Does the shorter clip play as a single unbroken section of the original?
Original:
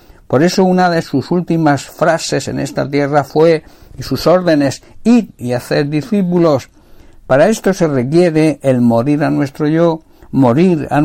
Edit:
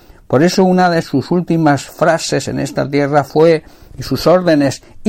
yes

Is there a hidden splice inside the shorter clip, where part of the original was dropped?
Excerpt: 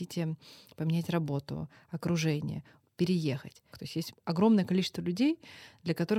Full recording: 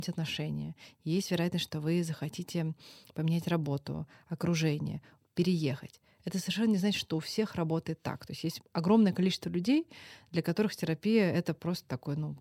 yes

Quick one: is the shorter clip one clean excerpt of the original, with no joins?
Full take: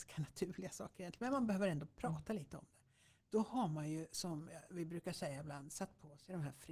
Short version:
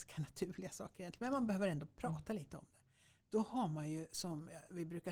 yes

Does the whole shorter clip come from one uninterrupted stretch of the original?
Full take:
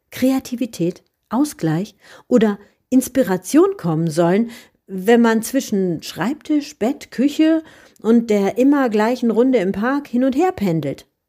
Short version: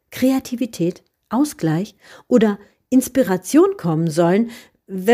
yes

